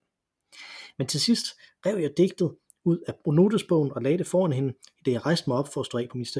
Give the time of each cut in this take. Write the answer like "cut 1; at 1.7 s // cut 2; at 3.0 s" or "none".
none